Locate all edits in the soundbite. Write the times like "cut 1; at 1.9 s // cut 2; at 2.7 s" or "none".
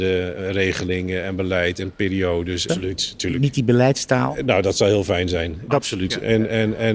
cut 1; at 2.7 s // cut 2; at 5.7 s